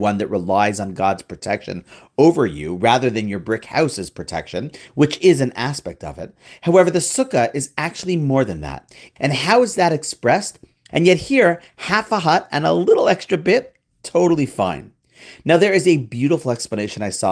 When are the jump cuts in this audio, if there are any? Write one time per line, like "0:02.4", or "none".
0:09.2
0:10.9